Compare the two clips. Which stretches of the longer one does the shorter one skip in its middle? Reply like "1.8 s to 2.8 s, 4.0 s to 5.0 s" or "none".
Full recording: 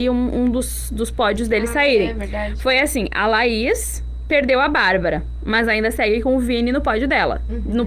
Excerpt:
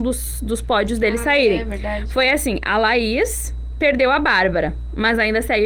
none